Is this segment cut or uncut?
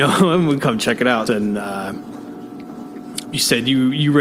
cut